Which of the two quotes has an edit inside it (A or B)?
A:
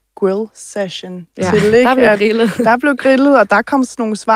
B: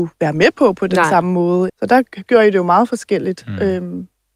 B